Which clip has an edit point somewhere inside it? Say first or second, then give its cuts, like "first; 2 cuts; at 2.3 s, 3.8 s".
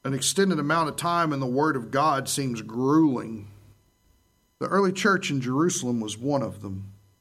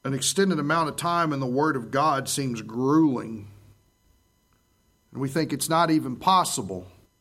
first; 1 cut; at 4.5 s